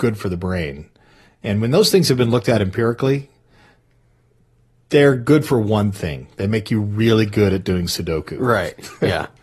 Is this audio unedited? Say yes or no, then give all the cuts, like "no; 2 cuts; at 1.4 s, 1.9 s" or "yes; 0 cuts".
yes; 0 cuts